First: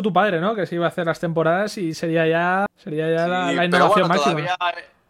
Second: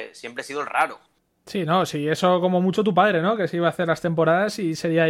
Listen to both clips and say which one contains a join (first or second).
first